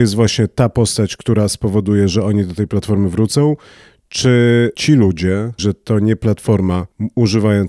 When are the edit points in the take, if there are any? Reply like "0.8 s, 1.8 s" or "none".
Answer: 5.6 s